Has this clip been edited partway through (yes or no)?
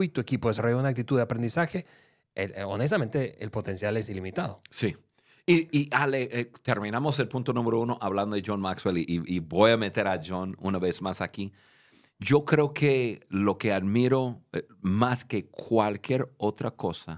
no